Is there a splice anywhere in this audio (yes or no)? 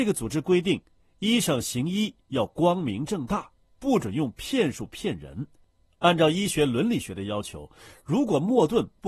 no